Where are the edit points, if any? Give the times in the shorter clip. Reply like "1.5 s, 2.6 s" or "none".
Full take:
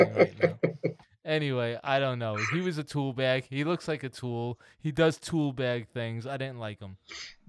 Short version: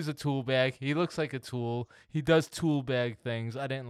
none